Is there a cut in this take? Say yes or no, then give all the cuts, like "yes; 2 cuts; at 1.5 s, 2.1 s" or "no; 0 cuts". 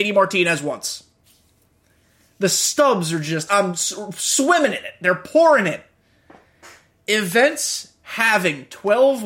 yes; 1 cut; at 3.5 s